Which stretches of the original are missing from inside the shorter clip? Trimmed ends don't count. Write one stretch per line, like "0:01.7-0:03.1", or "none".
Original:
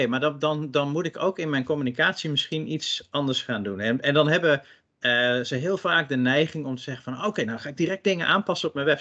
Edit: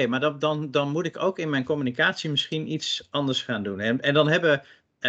none

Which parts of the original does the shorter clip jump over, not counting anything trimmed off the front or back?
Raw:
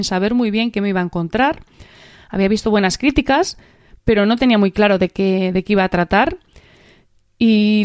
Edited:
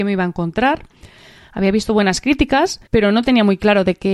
0:03.6-0:04.0

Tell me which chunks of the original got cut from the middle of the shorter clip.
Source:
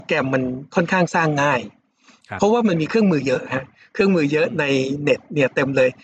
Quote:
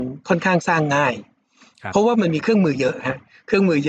none

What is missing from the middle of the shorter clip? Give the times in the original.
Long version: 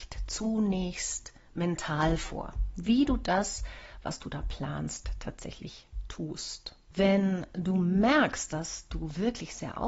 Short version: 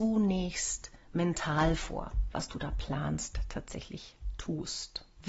0:02.7-0:04.0

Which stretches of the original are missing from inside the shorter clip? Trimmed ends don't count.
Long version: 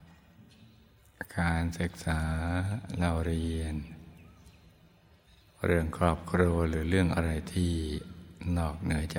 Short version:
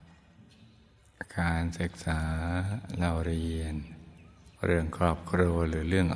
0:04.5-0:05.6

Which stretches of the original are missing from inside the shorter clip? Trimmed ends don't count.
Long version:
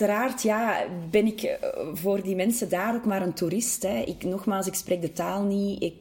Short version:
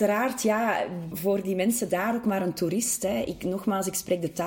0:01.1-0:01.9

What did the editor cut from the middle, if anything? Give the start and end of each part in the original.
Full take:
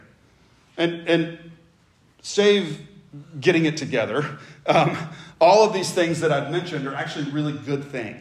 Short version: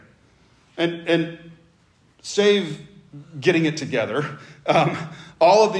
none

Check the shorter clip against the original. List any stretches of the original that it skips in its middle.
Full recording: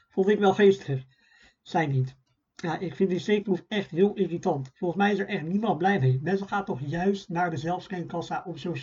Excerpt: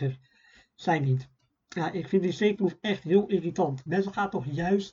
0:04.7-0:06.2

